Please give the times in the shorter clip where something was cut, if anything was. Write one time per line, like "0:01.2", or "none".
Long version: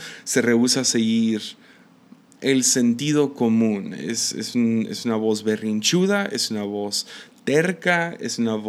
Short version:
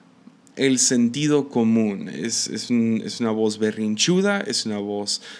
none